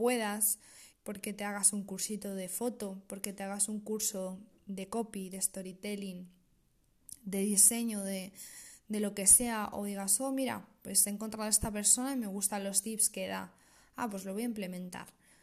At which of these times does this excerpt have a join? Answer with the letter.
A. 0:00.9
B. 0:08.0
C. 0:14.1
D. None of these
A